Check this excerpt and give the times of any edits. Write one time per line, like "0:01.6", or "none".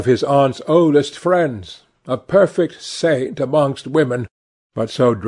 none